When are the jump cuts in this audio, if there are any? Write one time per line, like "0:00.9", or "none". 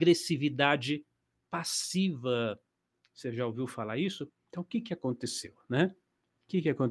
0:04.3